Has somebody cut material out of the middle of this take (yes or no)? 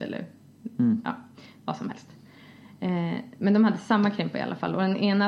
no